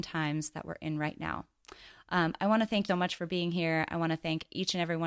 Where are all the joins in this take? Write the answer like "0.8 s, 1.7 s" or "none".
2.9 s